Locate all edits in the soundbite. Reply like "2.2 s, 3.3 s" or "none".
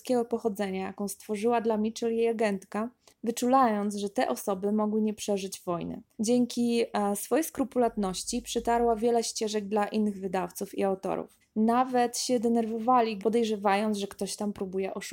6.1 s, 11.4 s, 13.2 s